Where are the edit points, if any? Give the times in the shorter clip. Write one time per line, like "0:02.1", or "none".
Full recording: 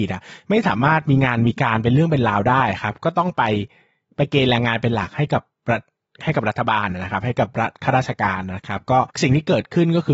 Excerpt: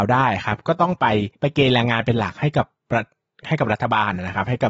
0:01.3